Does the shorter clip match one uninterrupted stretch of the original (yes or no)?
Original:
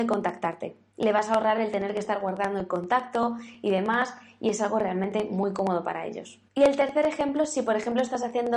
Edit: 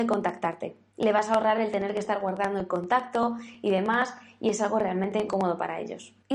no